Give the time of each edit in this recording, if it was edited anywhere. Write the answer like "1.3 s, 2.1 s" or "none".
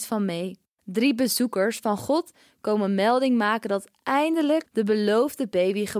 4.6 s